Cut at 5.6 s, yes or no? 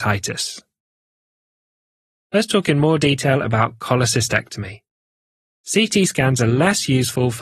yes